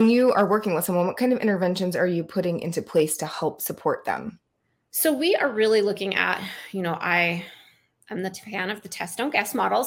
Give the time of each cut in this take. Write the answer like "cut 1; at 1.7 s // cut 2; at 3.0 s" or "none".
none